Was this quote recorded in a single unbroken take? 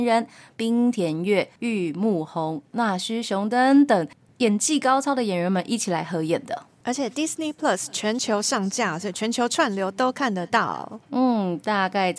yes; 0 cuts

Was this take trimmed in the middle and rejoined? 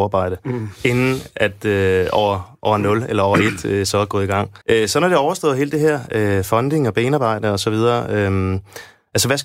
yes; 1 cut; at 4.6 s

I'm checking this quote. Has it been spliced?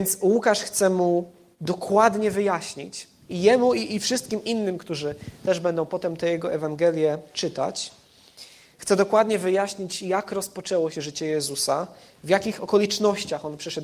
no; 0 cuts

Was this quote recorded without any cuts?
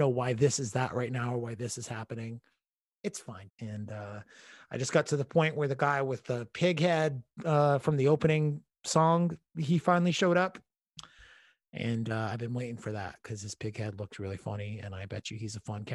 no; 1 cut; at 3.5 s

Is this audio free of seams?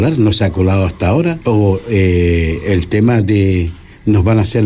no; 1 cut; at 1.4 s

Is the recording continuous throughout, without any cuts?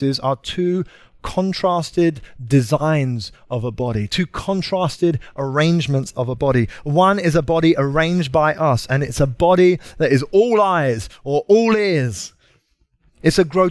yes; 0 cuts

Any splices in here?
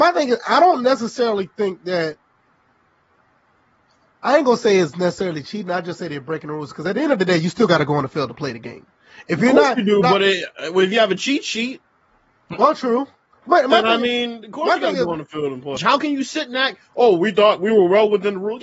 yes; 1 cut; at 15.8 s

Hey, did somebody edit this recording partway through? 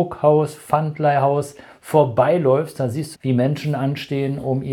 yes; 1 cut; at 3.1 s

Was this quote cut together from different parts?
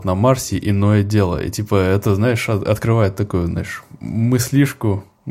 no; 0 cuts

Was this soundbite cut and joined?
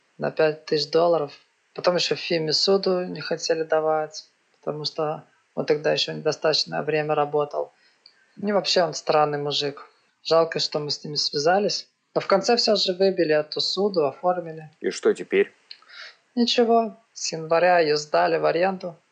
yes; 2 cuts; at 10.1 s, 17.0 s

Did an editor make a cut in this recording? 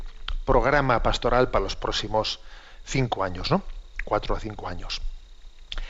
no; 0 cuts

